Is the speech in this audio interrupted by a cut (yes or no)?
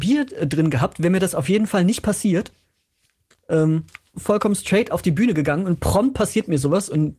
yes